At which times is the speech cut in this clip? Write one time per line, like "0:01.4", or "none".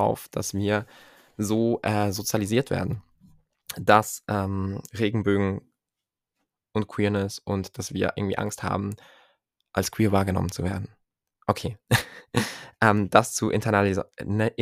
none